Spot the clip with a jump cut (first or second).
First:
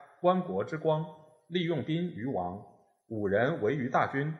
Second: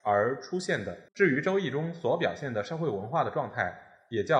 second